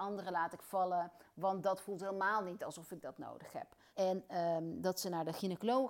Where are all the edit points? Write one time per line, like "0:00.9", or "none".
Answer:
0:03.9